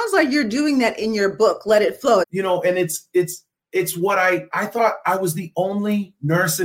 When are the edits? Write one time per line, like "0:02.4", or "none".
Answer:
0:02.2